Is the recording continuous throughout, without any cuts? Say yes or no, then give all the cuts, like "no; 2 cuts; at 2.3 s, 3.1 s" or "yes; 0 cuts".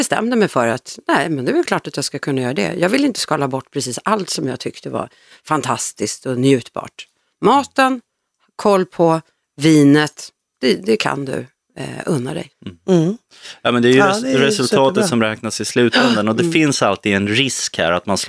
no; 1 cut; at 12.5 s